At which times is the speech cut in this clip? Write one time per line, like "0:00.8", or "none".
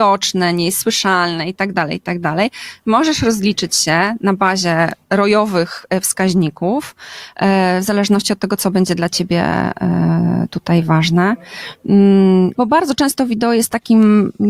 0:05.0
0:12.5